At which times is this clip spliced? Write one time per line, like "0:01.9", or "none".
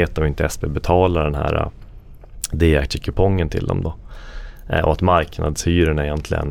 none